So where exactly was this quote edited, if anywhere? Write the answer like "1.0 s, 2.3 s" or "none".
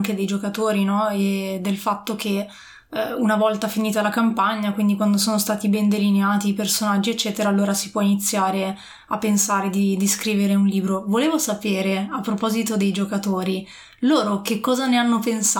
none